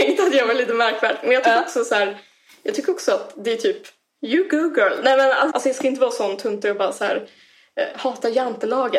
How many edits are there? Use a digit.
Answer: 1